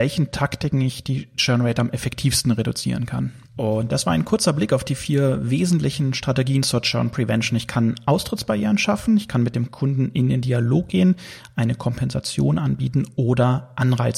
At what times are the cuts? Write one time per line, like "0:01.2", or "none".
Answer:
0:03.5